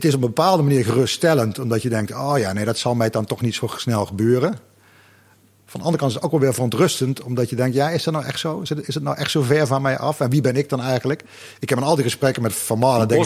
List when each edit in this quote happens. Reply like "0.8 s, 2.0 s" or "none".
none